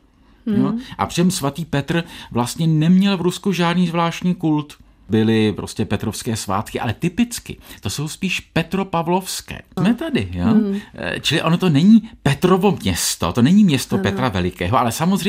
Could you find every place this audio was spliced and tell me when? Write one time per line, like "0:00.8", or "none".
0:09.8